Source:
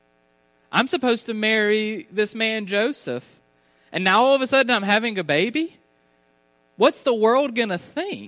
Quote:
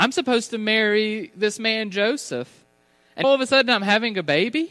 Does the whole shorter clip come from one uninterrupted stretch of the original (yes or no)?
no